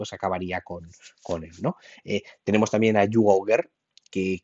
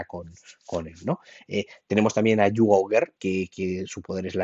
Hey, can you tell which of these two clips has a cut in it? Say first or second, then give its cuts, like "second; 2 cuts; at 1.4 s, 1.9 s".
second; 1 cut; at 3.2 s